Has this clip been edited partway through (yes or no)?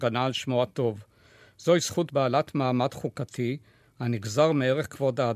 no